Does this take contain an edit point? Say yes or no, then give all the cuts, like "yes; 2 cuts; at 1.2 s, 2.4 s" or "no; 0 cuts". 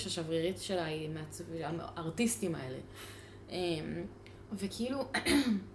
yes; 1 cut; at 4.5 s